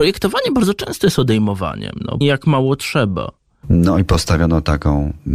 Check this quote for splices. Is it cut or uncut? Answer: cut